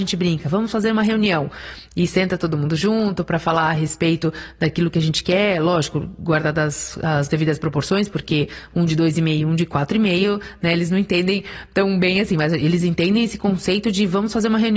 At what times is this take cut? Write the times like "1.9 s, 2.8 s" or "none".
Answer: none

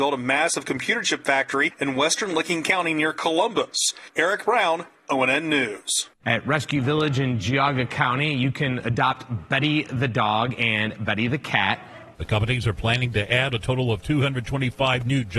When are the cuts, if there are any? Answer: 4.1 s, 6.2 s, 12.1 s

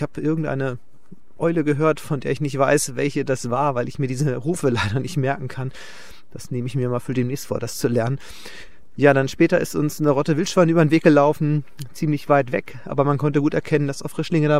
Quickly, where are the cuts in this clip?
none

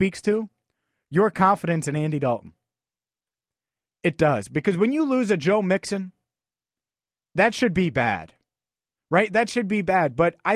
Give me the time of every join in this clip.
none

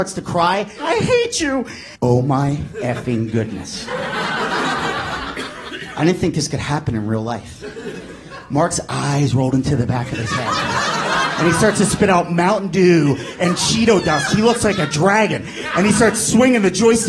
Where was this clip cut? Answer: 1.9 s

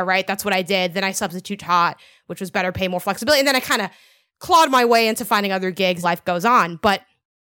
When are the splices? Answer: 6.0 s

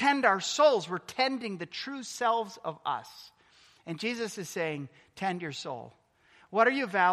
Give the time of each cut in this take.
none

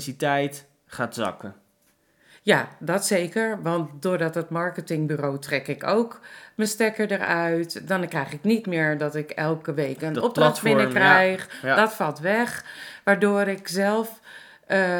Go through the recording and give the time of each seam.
none

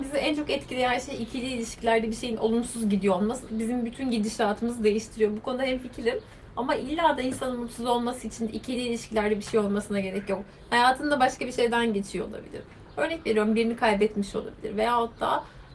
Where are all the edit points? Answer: none

